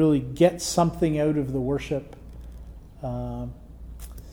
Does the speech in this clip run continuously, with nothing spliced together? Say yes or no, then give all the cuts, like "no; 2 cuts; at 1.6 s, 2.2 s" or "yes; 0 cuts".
yes; 0 cuts